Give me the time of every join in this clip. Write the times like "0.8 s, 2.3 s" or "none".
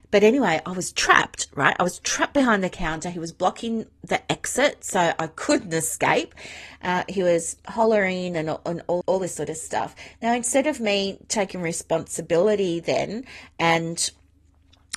9.0 s